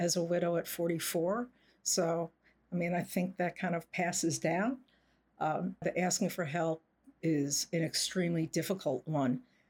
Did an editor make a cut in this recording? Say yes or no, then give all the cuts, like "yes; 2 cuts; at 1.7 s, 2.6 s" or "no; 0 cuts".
yes; 1 cut; at 5.8 s